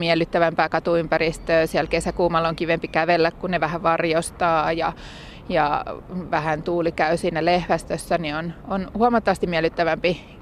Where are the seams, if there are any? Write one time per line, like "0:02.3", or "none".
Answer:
none